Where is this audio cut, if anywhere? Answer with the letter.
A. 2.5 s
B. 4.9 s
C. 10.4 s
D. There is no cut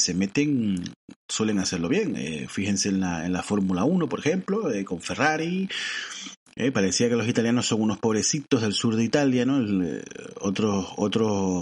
D